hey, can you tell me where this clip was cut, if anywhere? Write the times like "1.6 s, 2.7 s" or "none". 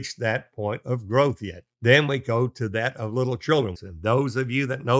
1.7 s, 3.7 s